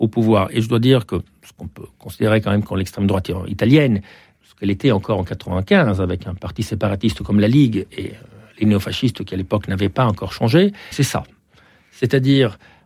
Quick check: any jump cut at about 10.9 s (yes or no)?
yes